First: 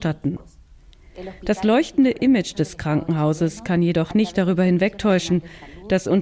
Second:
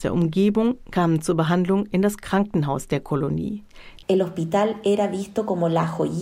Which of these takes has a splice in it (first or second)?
second